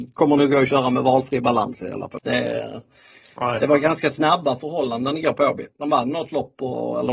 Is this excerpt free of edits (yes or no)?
no